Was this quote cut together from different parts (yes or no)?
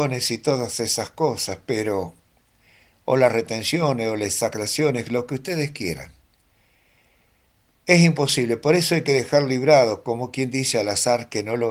no